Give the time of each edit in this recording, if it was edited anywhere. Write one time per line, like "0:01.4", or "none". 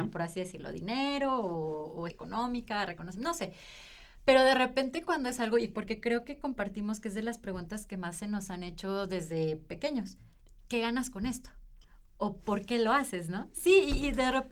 0:02.1